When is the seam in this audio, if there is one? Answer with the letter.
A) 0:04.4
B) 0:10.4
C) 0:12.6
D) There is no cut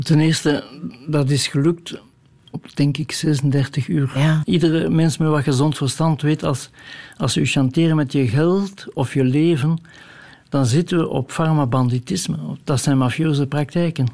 A